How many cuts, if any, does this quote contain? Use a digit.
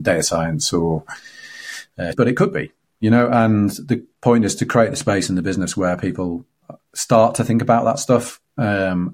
1